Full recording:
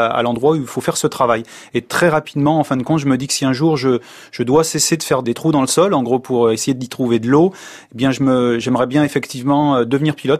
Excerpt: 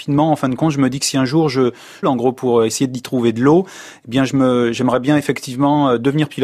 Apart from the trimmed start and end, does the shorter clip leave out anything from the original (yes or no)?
yes